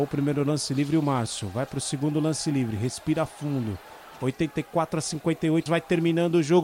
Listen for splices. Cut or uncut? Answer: cut